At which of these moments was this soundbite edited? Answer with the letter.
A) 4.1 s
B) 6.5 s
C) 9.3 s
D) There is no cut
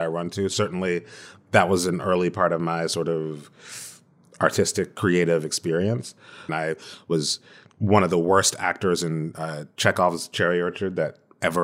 B